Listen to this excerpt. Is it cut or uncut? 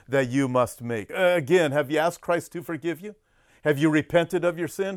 uncut